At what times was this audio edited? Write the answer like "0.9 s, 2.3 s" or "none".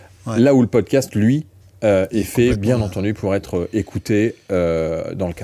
none